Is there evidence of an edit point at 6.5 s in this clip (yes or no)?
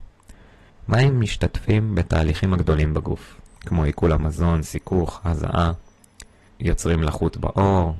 yes